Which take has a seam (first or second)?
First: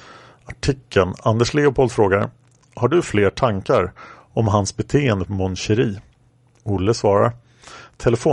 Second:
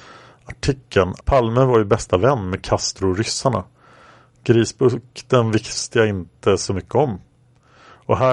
second